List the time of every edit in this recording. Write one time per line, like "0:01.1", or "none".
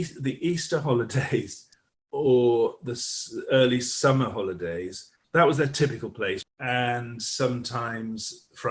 0:05.2
0:06.4

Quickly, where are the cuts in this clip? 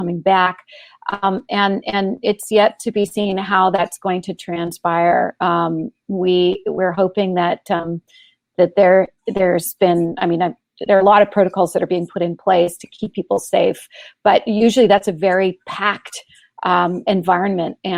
none

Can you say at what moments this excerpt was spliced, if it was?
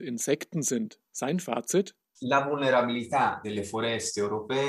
none

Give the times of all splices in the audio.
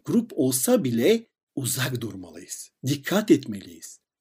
0:02.8

